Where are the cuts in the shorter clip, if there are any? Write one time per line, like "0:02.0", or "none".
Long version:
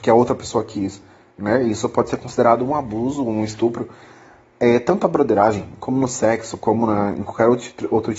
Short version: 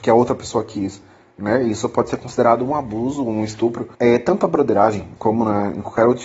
0:03.9
0:05.2